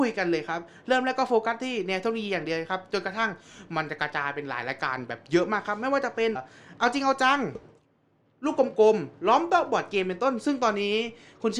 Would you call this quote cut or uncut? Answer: cut